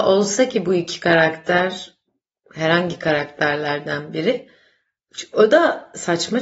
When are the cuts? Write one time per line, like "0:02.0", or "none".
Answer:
none

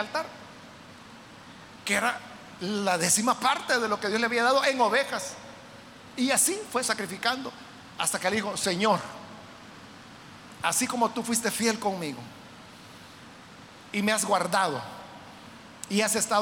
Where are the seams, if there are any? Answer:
0:06.8

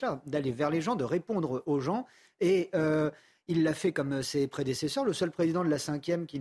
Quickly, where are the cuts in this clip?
none

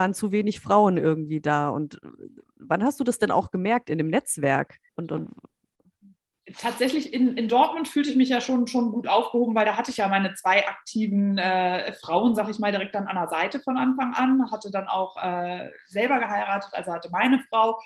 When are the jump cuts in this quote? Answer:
0:04.9

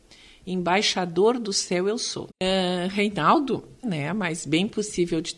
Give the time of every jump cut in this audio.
0:02.3
0:03.8

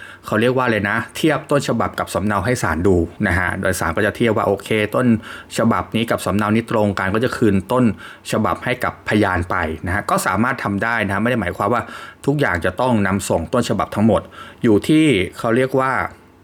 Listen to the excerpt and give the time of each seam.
0:03.2

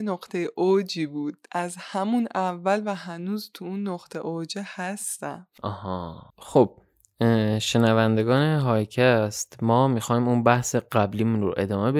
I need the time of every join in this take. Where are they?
0:06.3

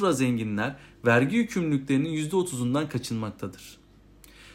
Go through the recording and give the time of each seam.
none

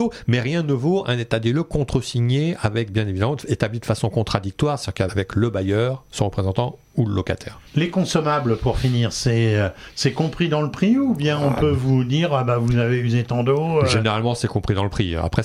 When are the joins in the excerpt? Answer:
0:05.1
0:07.7

